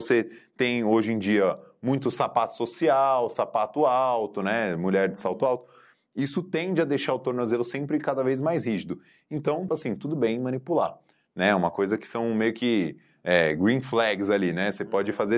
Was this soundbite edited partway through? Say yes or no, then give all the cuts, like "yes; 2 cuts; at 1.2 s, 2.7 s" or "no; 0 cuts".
yes; 1 cut; at 9.7 s